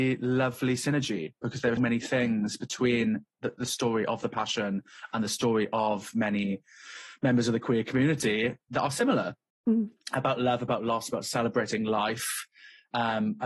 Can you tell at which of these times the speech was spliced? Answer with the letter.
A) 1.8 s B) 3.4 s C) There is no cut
A